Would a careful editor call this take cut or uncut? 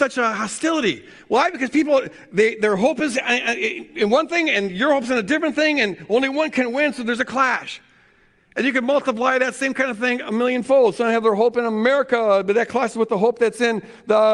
uncut